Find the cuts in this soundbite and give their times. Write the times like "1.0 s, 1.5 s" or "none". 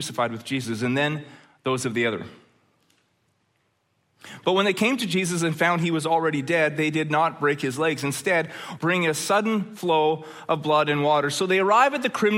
8.8 s